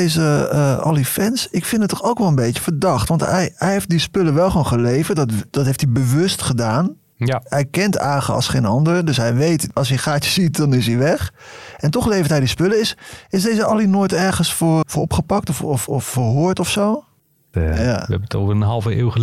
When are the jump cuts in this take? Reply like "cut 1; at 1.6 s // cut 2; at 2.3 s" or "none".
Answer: cut 1; at 14.8 s // cut 2; at 17.5 s